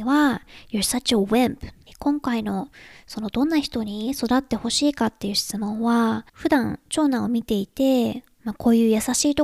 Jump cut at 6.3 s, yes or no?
yes